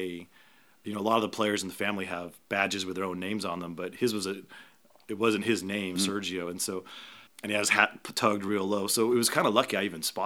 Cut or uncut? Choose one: cut